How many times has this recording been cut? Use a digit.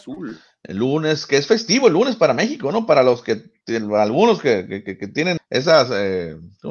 1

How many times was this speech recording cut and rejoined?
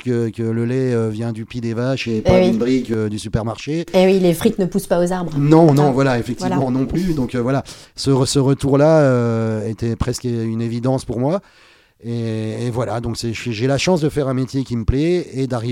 0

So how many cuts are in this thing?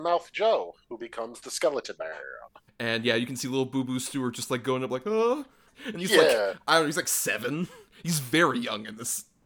2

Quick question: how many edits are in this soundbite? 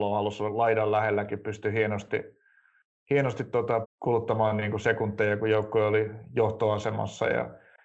1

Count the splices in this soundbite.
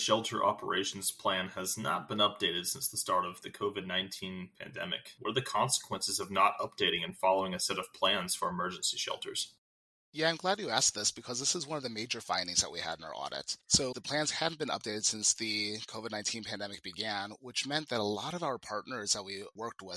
1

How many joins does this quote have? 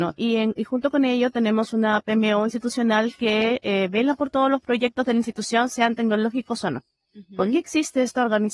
0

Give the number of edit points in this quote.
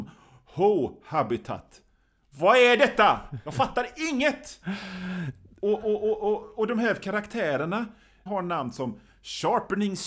1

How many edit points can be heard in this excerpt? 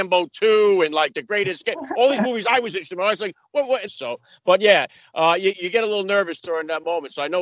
2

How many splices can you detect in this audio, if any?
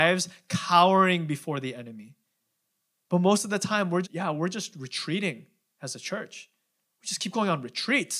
2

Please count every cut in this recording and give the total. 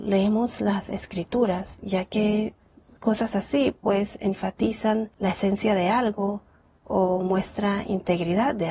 0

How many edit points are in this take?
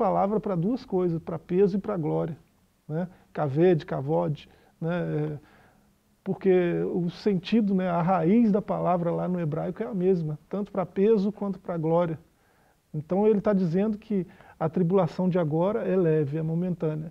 0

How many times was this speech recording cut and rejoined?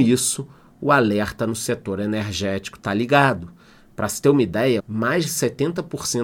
1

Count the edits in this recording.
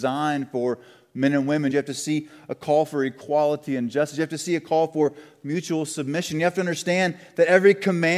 1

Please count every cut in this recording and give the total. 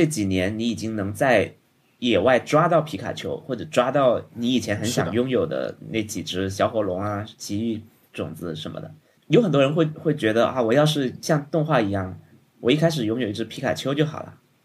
1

